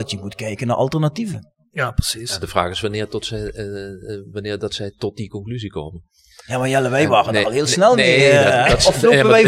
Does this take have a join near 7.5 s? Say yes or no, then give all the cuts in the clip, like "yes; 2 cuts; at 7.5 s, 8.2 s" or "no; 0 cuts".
no; 0 cuts